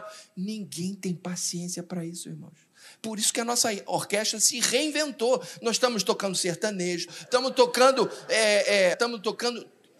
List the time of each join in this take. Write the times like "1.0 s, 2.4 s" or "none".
7.1 s, 8.9 s